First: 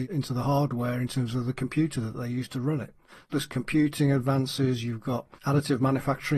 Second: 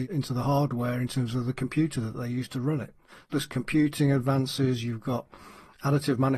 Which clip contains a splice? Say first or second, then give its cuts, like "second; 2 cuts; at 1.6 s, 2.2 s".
first; 1 cut; at 5.3 s